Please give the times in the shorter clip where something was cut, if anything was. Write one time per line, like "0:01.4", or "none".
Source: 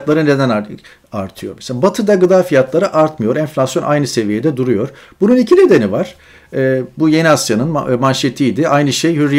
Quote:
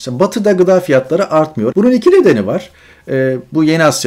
0:01.7